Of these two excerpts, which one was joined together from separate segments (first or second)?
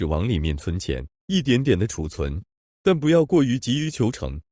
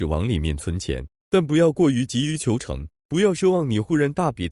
second